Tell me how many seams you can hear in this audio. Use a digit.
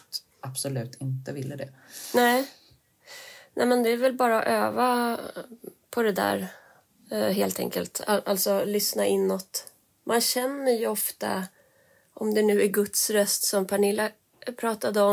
0